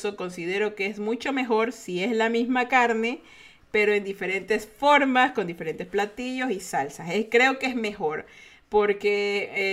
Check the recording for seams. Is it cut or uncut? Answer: uncut